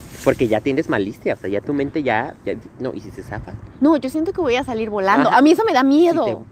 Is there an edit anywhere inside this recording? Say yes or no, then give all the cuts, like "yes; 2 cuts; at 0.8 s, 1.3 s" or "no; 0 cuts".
no; 0 cuts